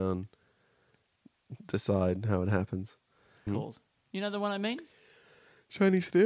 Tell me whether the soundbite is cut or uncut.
cut